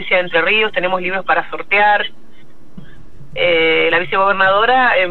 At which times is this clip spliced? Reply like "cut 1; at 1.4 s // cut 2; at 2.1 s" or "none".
cut 1; at 2.8 s